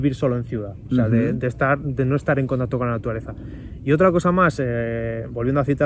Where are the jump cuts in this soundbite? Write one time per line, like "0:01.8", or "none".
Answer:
none